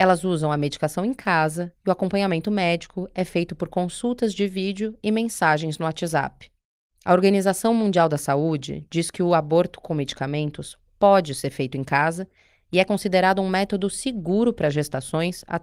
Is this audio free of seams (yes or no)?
yes